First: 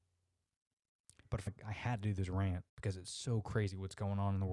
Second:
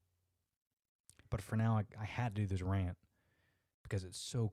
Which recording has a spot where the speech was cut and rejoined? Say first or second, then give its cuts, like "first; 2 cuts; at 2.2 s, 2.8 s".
first; 2 cuts; at 1.5 s, 2.7 s